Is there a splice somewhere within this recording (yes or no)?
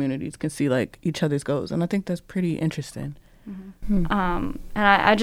yes